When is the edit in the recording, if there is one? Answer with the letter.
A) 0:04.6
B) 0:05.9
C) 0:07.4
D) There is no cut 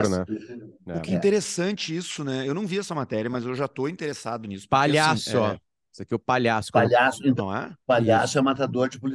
C